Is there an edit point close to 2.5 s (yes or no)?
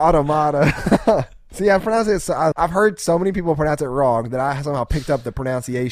yes